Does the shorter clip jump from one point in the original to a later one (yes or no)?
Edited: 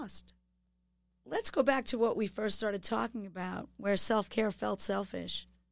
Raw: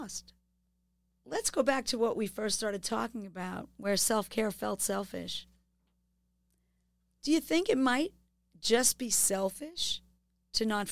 no